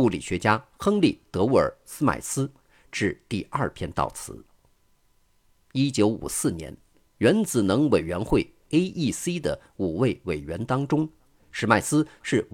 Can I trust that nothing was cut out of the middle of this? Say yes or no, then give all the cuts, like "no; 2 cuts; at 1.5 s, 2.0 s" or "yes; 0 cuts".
yes; 0 cuts